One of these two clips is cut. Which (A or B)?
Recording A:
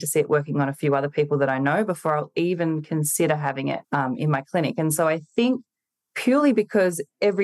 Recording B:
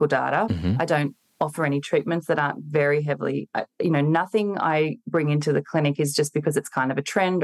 A